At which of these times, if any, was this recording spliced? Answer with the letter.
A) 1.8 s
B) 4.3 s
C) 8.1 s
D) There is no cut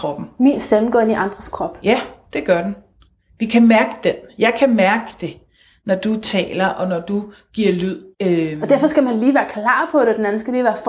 C